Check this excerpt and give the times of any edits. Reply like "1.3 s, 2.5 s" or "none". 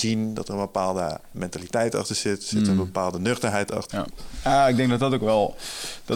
3.9 s